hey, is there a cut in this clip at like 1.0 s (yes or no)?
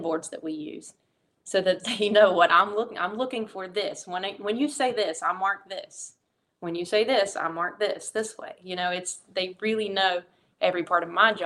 no